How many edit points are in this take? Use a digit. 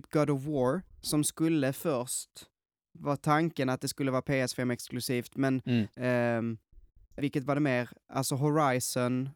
2